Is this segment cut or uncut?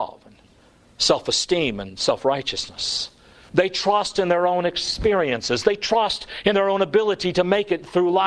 cut